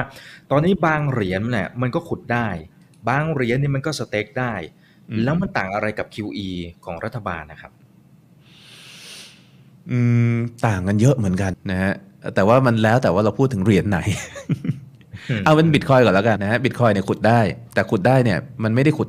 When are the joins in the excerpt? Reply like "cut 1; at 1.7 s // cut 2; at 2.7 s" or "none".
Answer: cut 1; at 11.5 s // cut 2; at 16.4 s